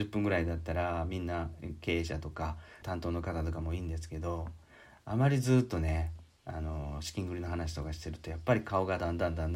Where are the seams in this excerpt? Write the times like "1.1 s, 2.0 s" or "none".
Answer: 2.8 s